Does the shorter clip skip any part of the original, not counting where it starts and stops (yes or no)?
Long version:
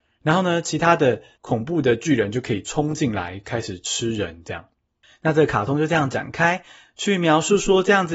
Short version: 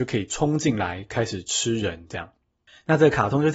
no